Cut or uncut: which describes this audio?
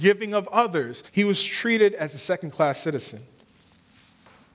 cut